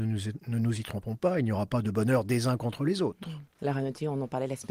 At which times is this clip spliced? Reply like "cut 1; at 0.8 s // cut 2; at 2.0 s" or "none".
cut 1; at 3.5 s

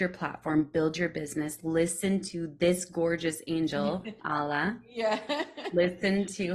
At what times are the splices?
cut 1; at 4.2 s

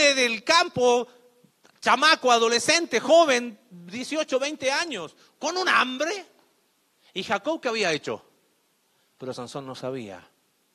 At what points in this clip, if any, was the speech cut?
cut 1; at 9.0 s

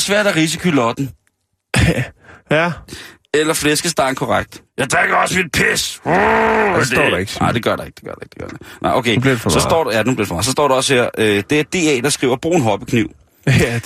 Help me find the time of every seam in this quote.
cut 1; at 4.6 s

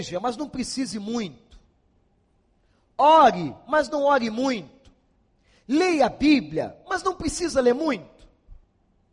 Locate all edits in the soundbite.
none

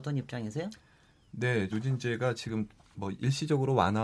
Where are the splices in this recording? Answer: cut 1; at 1.7 s

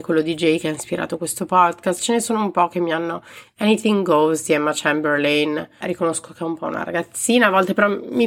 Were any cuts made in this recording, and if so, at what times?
cut 1; at 5.8 s

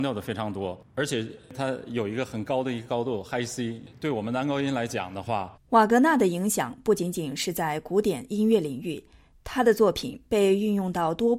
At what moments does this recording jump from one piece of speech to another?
cut 1; at 5.5 s

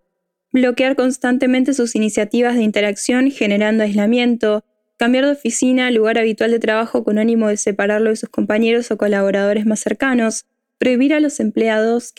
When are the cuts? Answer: none

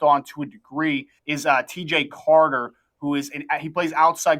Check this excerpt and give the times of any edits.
cut 1; at 1.2 s

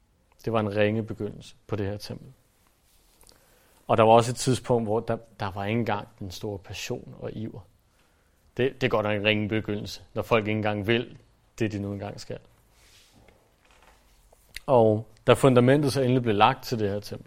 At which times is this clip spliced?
cut 1; at 1.6 s // cut 2; at 8.4 s

